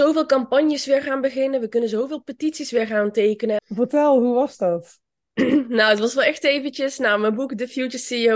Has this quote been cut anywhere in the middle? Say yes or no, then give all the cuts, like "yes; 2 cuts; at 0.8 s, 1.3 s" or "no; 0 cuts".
yes; 1 cut; at 3.6 s